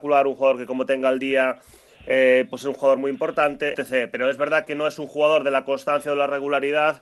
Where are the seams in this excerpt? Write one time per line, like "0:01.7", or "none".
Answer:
0:03.7